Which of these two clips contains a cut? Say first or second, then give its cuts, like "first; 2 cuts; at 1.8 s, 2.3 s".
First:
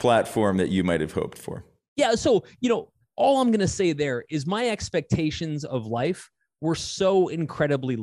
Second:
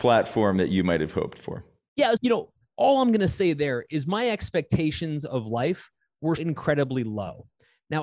second; 2 cuts; at 2.2 s, 6.4 s